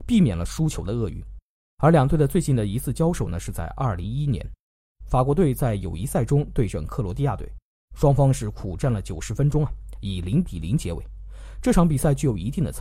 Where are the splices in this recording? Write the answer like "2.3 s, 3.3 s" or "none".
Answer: none